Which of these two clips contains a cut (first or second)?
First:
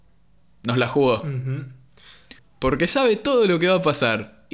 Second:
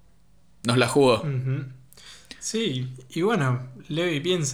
first